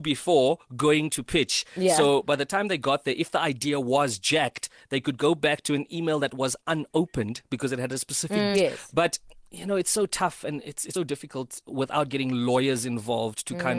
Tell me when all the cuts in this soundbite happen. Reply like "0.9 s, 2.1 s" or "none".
8.5 s, 10.9 s